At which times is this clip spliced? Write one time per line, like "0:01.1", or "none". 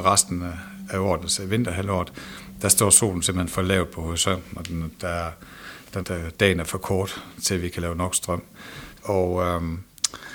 0:06.0
0:08.9